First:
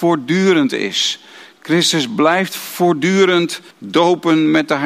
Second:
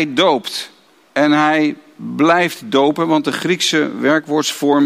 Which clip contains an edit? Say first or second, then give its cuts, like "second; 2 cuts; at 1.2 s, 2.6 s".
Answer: first; 1 cut; at 3.7 s